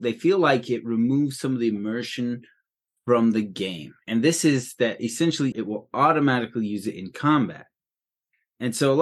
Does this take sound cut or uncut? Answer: cut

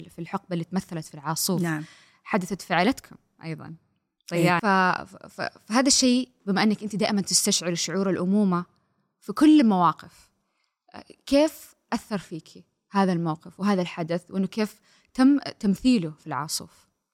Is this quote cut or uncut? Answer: cut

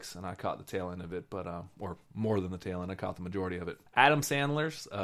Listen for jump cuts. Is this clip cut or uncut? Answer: cut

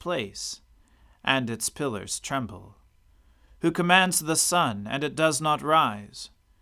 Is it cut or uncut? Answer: uncut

